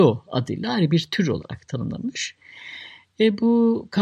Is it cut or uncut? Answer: uncut